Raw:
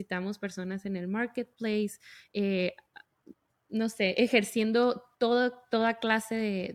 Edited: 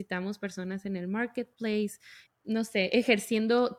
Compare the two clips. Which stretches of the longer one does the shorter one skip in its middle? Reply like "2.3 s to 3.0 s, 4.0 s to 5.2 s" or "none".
2.3 s to 3.5 s